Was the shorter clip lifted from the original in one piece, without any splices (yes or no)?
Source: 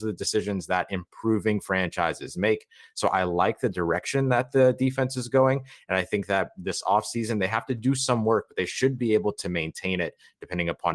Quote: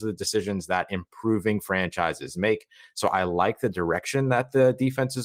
yes